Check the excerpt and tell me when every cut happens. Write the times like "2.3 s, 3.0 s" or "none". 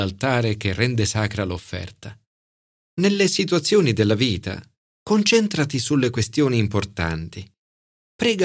none